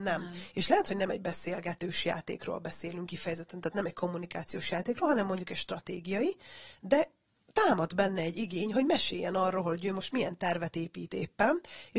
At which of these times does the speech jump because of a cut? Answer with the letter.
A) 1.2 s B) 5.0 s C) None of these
C